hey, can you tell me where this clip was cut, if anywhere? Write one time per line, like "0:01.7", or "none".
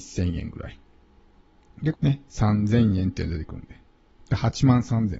0:01.9
0:04.2